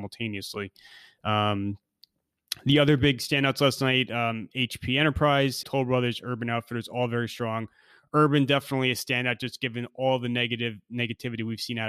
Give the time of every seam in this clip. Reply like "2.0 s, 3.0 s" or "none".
5.6 s